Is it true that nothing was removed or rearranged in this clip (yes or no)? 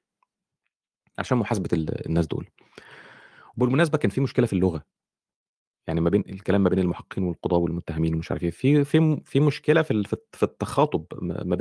yes